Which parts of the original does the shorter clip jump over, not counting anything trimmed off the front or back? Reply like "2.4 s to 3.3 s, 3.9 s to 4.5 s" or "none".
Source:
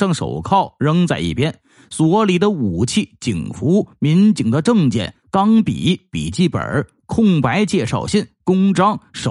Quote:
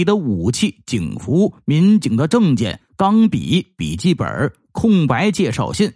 none

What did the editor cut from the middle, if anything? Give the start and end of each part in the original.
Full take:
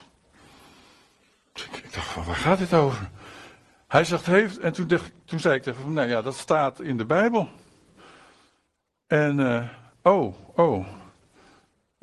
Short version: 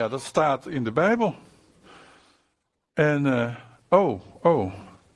none

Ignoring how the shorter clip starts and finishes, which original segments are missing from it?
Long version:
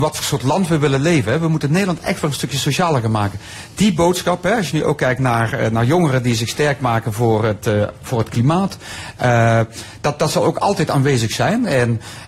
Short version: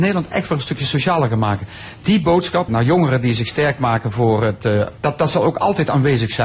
4.4 s to 5.7 s, 8.0 s to 10.0 s

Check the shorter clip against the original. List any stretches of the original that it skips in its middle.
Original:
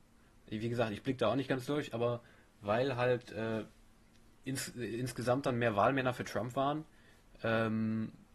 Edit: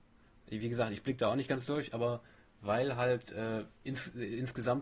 3.8 s to 4.4 s

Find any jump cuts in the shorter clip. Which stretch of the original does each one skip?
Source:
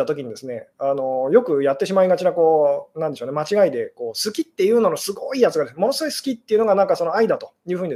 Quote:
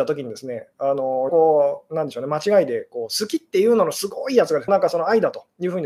1.3 s to 2.3 s, 5.7 s to 6.7 s

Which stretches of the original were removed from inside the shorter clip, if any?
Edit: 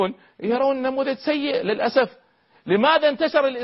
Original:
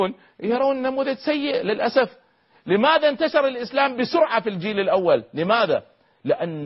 none

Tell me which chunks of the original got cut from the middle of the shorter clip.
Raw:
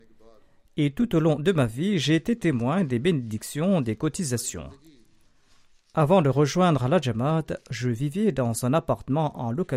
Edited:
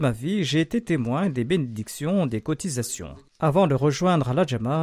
4.8 s to 5.8 s

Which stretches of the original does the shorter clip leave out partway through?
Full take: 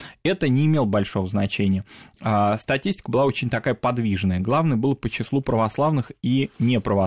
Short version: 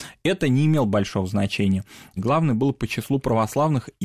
2.2 s to 4.4 s

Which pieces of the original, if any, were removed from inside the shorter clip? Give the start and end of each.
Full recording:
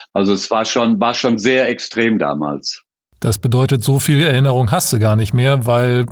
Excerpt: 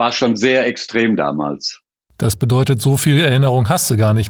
none

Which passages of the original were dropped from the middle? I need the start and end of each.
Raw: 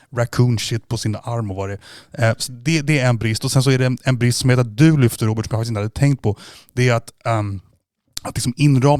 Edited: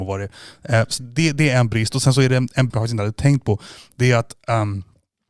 4.2 s to 5.5 s

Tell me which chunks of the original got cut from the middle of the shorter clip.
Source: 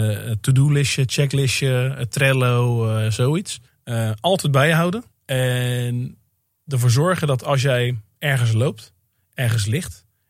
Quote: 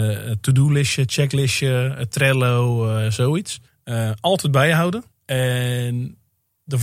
none

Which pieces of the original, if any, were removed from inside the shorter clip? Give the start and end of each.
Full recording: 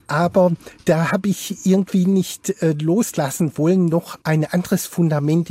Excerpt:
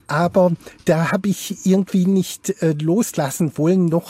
none

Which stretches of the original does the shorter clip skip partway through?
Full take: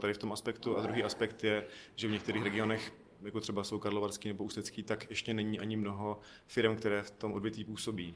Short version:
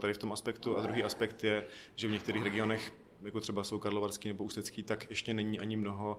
none

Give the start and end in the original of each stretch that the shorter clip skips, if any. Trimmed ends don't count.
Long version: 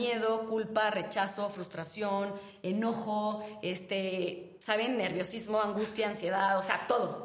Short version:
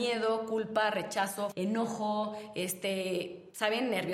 1.5 s to 2.6 s

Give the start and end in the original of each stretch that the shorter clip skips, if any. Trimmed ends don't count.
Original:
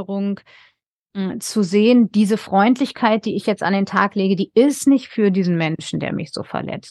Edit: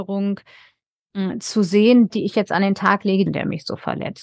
2.1 s to 3.2 s, 4.4 s to 5.9 s

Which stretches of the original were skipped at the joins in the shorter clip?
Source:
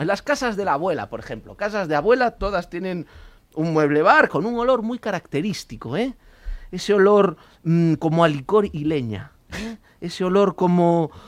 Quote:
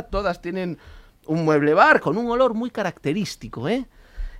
none

